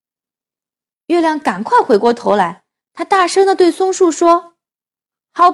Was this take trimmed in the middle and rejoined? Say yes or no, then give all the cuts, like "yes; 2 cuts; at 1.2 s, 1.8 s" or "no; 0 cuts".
yes; 1 cut; at 0.9 s